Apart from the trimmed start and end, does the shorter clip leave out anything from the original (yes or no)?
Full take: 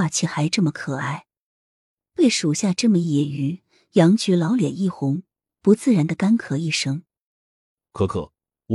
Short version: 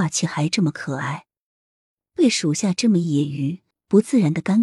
yes